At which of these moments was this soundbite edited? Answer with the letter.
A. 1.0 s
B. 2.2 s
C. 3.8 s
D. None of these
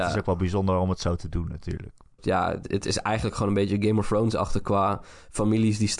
B